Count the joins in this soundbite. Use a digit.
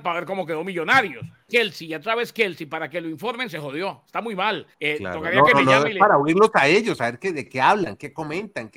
2